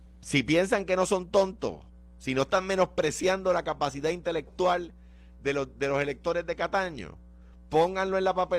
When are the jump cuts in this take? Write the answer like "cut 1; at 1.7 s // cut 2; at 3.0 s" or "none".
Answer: none